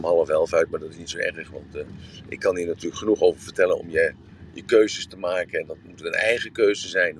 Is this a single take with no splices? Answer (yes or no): yes